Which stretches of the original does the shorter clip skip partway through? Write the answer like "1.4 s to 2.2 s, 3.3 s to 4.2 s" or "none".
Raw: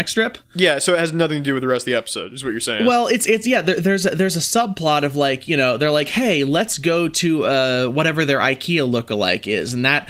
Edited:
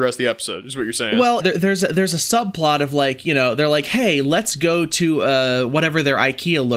3.1 s to 3.6 s